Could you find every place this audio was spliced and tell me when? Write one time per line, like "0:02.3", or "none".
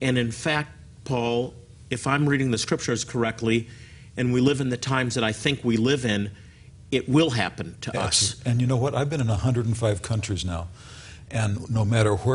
none